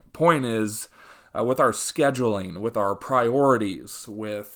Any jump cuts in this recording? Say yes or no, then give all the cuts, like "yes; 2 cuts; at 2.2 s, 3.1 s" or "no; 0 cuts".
no; 0 cuts